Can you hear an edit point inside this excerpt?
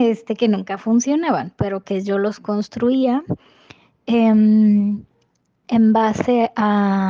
no; 0 cuts

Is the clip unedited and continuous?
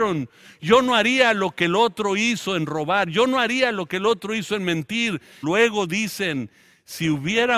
no; 1 cut; at 5.4 s

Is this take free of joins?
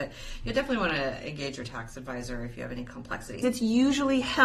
no; 1 cut; at 3.4 s

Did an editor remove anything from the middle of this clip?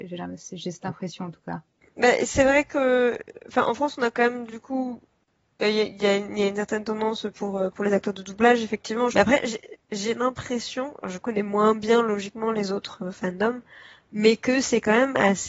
yes; 1 cut; at 9.1 s

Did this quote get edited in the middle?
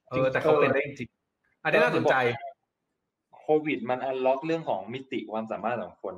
no; 0 cuts

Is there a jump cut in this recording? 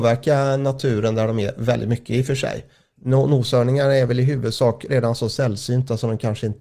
no; 0 cuts

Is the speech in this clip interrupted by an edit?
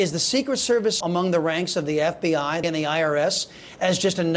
yes; 2 cuts; at 1.0 s, 2.6 s

